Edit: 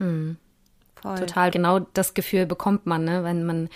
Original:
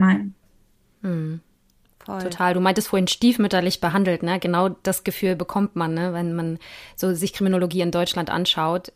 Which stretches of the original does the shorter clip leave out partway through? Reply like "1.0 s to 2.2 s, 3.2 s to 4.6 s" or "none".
2.5 s to 4.4 s